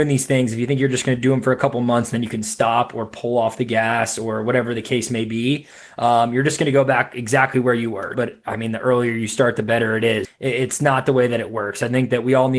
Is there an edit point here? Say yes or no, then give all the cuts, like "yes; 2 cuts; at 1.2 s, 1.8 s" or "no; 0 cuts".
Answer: yes; 2 cuts; at 8.1 s, 10.2 s